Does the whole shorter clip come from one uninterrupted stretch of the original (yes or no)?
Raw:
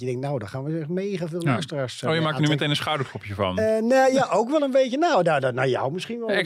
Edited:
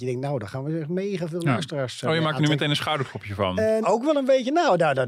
no